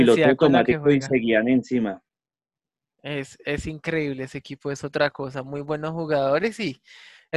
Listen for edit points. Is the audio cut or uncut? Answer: uncut